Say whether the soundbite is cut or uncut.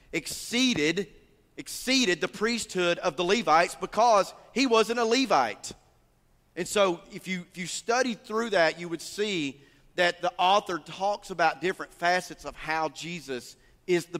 uncut